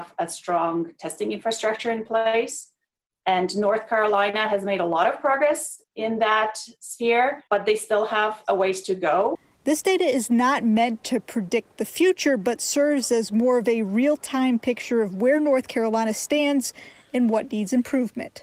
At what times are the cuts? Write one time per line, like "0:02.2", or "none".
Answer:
0:05.8
0:07.5

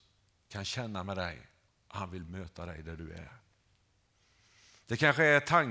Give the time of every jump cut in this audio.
0:01.7

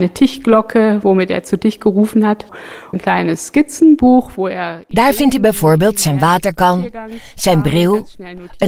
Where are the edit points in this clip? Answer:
none

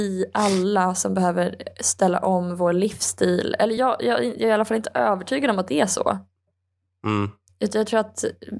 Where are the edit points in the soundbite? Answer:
none

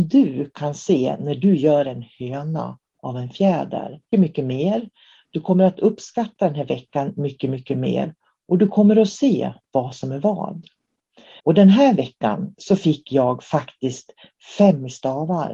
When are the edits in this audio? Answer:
0:04.1
0:11.4

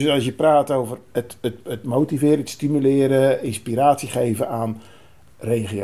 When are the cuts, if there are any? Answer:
0:01.1

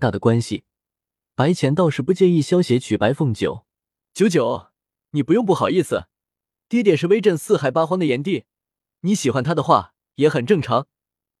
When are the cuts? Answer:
0:04.0

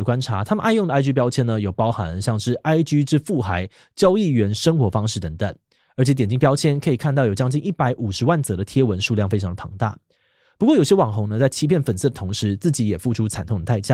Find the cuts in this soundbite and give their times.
none

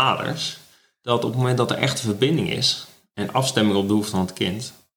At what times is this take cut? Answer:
none

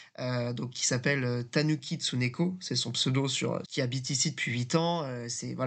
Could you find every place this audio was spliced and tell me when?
0:03.6

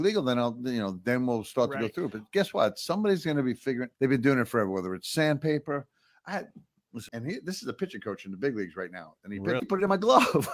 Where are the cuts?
0:03.9
0:07.1
0:09.6

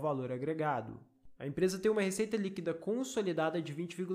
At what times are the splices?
0:01.4

